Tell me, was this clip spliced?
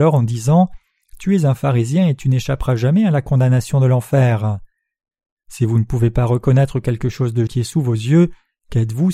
yes; 1 cut; at 7.5 s

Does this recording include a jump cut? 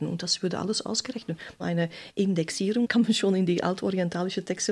no; 0 cuts

